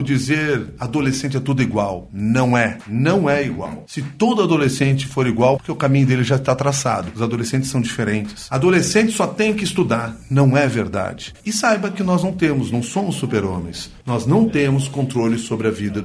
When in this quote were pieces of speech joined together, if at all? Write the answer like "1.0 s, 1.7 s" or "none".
5.6 s, 11.3 s, 14.0 s